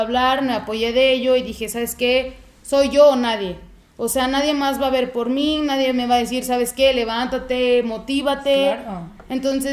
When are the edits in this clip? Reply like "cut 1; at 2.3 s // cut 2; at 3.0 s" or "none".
none

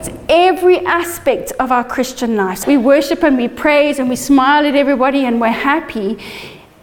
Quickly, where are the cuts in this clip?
cut 1; at 2.6 s

